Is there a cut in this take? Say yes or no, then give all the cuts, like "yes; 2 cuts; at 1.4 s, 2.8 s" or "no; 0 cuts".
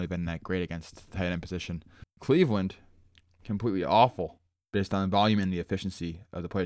no; 0 cuts